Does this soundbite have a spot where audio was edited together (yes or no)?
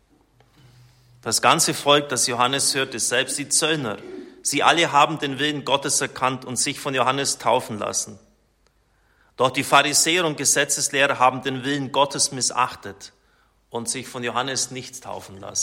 no